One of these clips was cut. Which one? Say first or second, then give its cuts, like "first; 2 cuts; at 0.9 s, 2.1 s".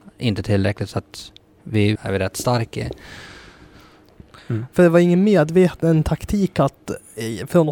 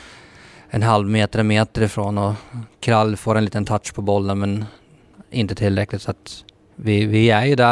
first; 1 cut; at 2.0 s